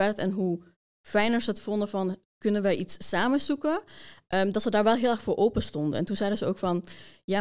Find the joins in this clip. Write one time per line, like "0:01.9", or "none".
none